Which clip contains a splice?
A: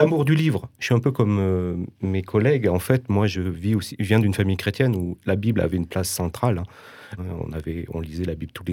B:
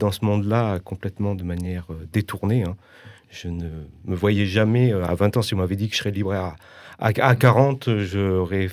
A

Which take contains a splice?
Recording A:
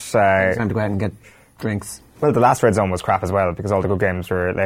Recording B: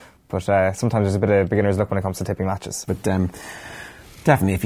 B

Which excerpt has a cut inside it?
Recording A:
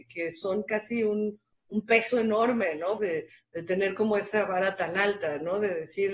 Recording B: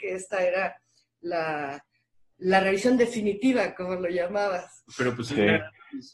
A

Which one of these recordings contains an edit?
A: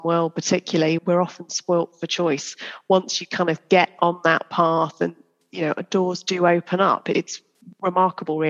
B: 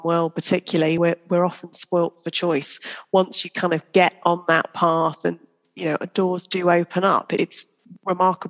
A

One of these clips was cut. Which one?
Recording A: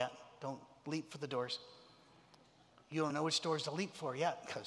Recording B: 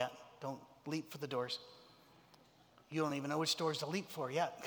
A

